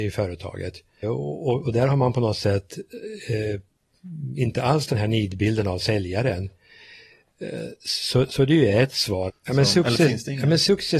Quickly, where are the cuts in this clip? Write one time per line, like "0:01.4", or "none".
0:01.0
0:09.3